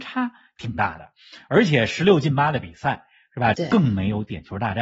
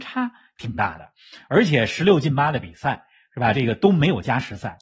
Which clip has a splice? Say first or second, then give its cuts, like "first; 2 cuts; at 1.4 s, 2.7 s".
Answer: first; 1 cut; at 3.5 s